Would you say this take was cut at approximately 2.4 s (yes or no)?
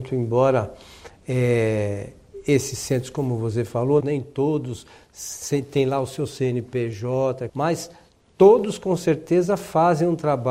no